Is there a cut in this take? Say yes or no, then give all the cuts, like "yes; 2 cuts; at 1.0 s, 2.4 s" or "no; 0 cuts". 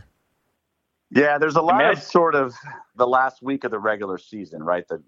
yes; 1 cut; at 2.9 s